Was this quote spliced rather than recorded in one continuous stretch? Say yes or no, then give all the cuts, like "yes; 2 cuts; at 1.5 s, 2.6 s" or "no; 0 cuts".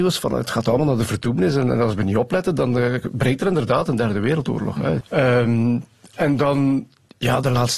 yes; 1 cut; at 5.0 s